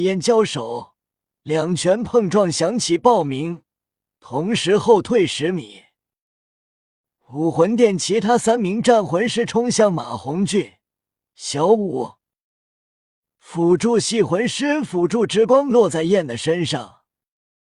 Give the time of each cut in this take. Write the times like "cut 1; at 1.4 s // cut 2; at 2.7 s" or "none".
none